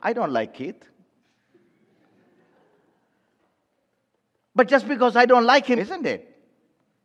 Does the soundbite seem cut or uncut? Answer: cut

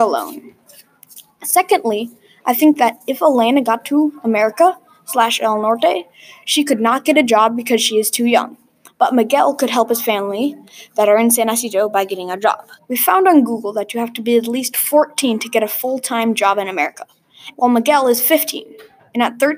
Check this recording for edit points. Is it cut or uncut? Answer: cut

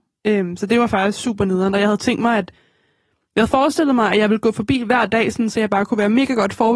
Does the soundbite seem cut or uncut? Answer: uncut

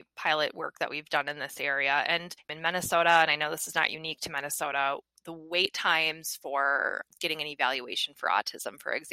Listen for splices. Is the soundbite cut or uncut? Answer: uncut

